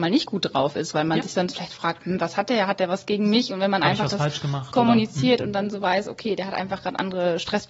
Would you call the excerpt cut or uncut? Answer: uncut